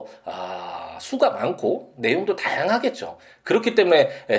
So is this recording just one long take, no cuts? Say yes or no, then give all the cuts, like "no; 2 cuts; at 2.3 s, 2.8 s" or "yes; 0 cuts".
yes; 0 cuts